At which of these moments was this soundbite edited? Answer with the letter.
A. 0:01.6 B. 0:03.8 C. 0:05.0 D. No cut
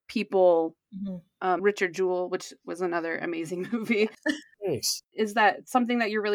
A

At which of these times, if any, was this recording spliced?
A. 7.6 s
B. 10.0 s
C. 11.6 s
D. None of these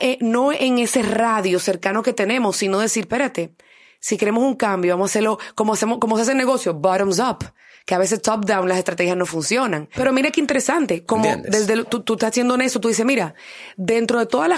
B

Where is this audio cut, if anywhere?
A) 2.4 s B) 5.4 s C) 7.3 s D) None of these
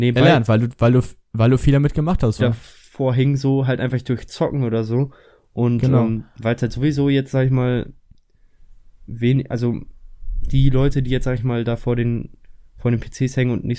A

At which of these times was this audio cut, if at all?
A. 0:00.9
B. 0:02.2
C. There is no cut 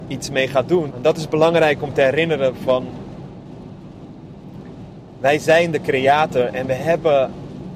A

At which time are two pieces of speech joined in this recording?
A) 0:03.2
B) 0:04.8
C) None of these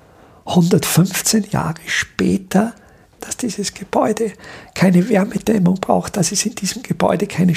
A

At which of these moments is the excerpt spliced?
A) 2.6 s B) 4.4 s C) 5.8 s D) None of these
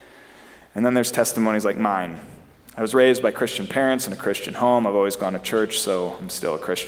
A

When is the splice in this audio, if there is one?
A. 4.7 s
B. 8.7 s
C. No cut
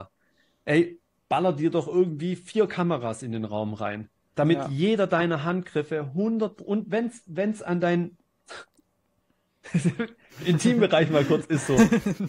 C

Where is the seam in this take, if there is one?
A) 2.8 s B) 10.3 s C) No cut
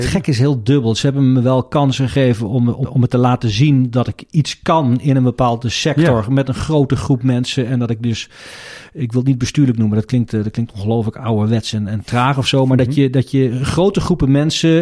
A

